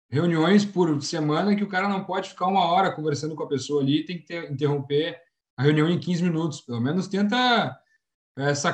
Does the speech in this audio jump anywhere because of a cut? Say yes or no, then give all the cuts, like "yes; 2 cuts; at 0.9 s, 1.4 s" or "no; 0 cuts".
no; 0 cuts